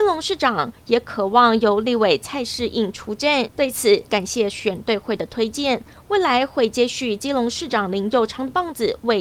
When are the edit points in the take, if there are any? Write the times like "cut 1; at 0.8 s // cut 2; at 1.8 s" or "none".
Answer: cut 1; at 4.1 s

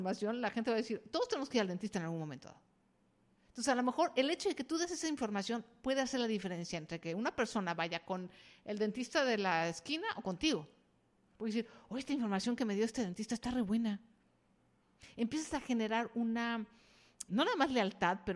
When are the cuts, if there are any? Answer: cut 1; at 17.3 s

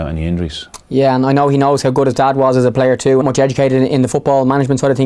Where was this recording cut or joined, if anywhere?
cut 1; at 3.2 s

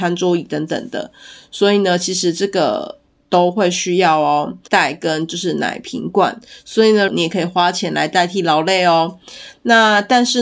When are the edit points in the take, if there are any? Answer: cut 1; at 4.7 s // cut 2; at 7.1 s

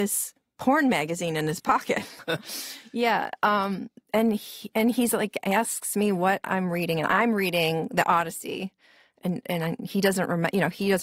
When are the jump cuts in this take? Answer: cut 1; at 2.2 s

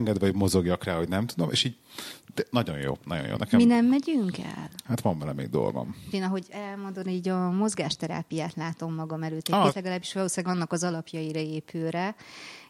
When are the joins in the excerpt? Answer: cut 1; at 4.8 s // cut 2; at 6.1 s // cut 3; at 9.7 s

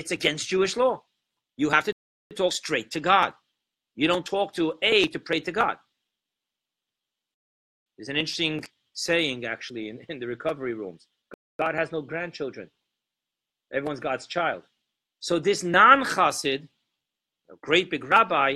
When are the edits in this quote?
cut 1; at 15.2 s

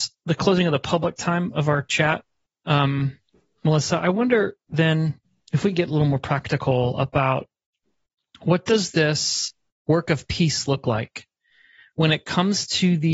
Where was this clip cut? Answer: none

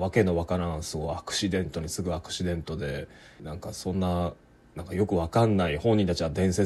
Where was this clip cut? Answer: cut 1; at 3.4 s

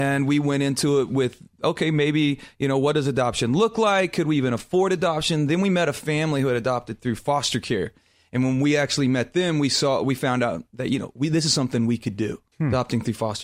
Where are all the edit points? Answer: cut 1; at 12.5 s

